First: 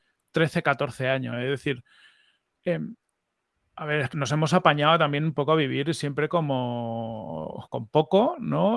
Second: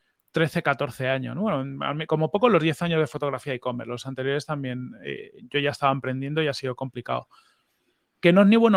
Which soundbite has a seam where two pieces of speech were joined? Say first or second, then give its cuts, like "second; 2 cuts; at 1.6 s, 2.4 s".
first; 3 cuts; at 1.3 s, 4.1 s, 7.7 s